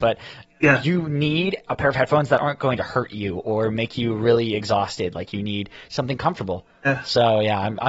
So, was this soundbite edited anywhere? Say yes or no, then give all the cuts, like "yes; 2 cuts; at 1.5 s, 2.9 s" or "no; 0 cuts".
no; 0 cuts